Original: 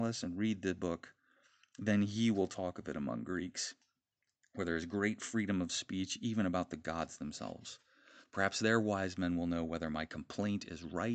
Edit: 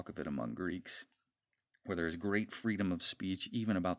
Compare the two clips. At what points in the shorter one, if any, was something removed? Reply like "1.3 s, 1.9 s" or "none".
none